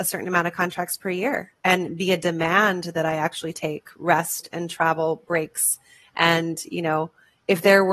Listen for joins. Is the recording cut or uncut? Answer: uncut